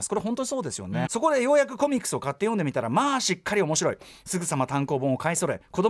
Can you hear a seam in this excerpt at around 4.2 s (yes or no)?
no